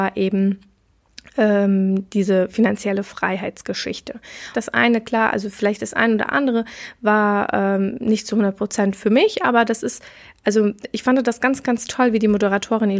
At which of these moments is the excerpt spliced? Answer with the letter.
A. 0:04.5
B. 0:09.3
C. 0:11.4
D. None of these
A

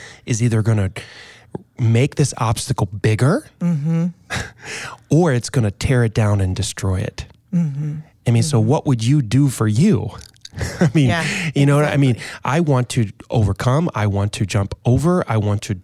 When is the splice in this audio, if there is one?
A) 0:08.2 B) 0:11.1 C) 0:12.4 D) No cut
D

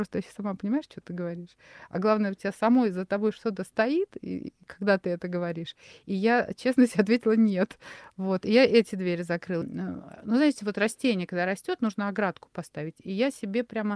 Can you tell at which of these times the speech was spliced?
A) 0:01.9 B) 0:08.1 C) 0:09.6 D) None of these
C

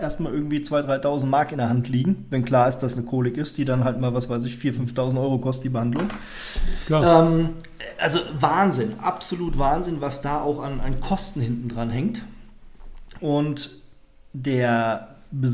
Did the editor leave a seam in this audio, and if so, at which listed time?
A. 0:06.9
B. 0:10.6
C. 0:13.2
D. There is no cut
C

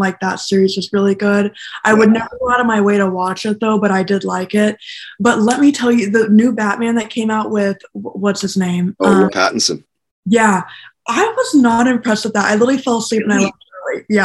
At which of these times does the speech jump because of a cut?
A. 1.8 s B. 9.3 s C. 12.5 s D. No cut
B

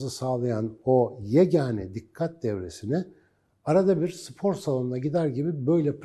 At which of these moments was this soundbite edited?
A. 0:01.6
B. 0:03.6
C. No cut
C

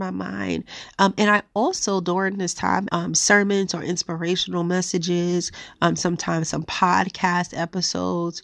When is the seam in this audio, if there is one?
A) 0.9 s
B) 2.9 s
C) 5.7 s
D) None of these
B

